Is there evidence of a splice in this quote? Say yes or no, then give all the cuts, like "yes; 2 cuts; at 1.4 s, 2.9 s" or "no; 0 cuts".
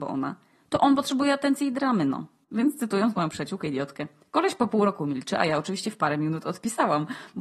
no; 0 cuts